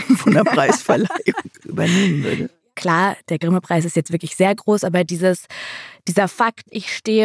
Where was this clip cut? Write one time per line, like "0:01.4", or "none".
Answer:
0:02.7